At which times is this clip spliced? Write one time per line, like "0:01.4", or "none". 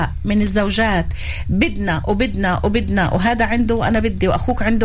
none